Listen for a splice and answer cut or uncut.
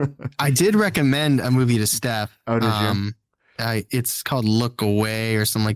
uncut